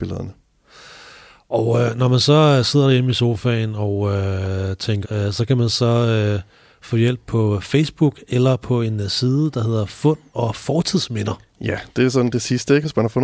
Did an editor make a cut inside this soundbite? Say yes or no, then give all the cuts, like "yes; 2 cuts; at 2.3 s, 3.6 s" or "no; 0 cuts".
yes; 1 cut; at 5.0 s